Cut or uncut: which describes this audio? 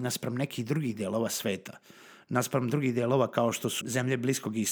cut